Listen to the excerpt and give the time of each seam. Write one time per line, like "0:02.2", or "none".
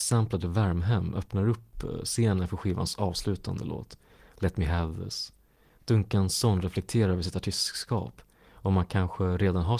none